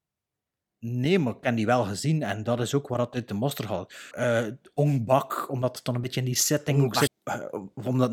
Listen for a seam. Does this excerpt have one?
yes; 2 cuts; at 4.1 s, 7.1 s

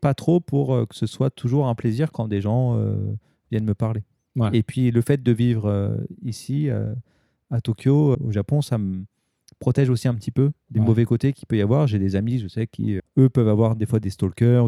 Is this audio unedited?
no; 2 cuts; at 8.1 s, 13.0 s

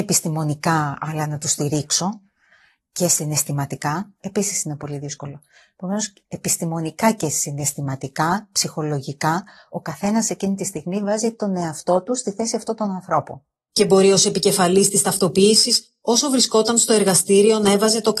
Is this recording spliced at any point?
yes; 1 cut; at 4.2 s

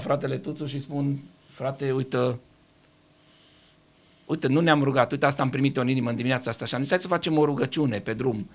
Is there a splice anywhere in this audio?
no; 0 cuts

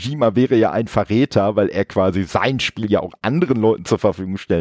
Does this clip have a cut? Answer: no; 0 cuts

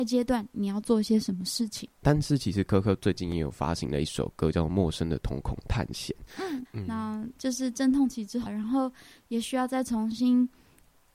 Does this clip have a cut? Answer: yes; 3 cuts; at 2.0 s, 6.7 s, 8.5 s

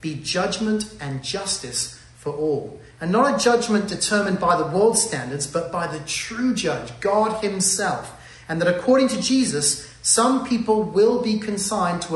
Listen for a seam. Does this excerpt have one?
no; 0 cuts

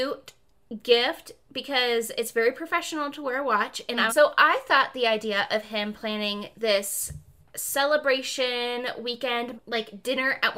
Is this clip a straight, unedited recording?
no; 2 cuts; at 4.1 s, 9.5 s

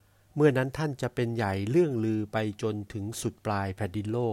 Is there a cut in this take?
no; 0 cuts

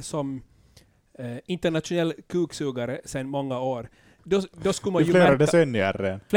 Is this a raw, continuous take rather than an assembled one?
yes; 0 cuts

